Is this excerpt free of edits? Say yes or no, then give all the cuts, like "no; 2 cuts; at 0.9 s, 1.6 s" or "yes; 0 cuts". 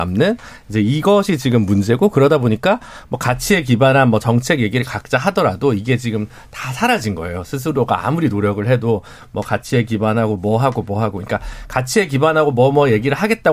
yes; 0 cuts